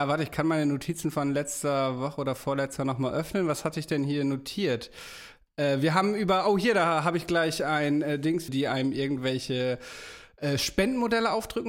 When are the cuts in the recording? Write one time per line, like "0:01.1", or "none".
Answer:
0:08.5